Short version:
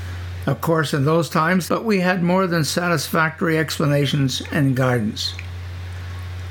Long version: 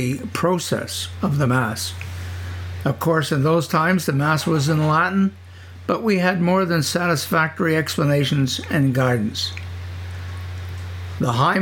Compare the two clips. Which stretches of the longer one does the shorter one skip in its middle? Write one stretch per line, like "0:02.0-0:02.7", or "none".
0:04.1-0:05.9